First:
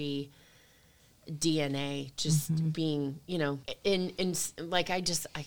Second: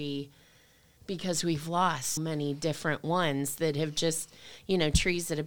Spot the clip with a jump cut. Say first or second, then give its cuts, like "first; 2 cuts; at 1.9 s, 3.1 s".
second; 2 cuts; at 1.0 s, 2.2 s